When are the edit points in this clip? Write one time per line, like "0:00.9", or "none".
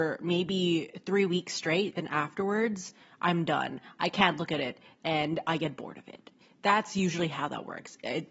none